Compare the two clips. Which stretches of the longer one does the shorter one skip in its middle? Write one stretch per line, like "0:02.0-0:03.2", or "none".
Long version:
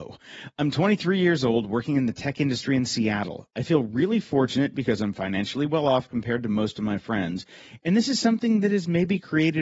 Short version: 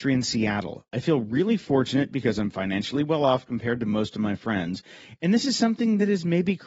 none